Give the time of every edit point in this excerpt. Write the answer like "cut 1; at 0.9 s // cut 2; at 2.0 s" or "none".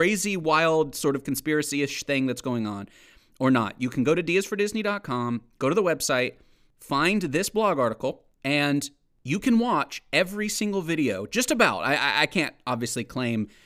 none